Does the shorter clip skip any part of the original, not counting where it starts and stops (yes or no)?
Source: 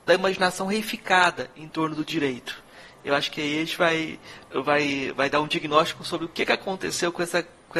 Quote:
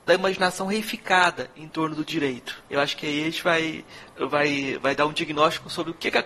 yes